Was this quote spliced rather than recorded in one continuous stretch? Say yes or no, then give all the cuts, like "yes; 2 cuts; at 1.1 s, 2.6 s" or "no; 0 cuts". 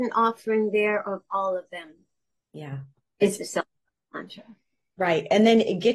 no; 0 cuts